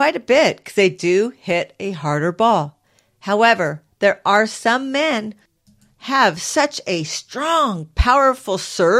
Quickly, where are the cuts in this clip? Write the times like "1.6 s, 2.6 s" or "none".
none

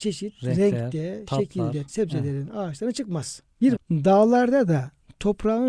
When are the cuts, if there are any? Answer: 1.9 s, 3.8 s

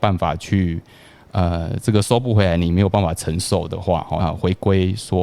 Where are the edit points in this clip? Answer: 4.2 s

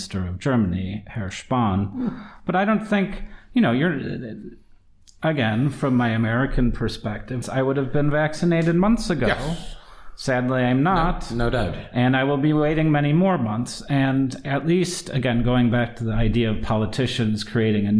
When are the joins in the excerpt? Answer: 7.4 s

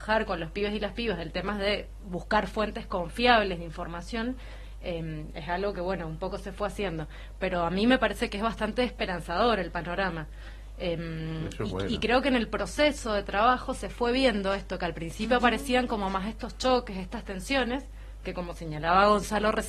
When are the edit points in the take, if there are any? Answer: 2.0 s

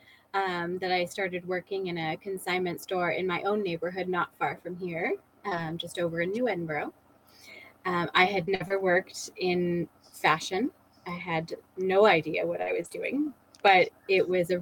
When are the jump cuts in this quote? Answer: none

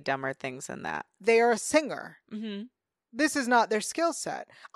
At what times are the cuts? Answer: 1.2 s

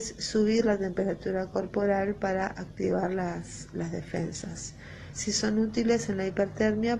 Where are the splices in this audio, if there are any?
none

